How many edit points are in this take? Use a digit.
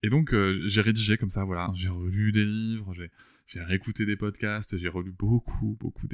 1